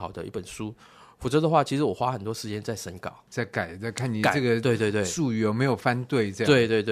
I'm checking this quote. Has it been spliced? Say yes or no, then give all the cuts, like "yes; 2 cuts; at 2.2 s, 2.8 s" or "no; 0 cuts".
no; 0 cuts